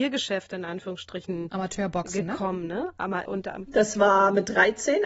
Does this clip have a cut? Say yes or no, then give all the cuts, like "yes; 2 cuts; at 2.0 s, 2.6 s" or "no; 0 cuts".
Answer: yes; 1 cut; at 3.3 s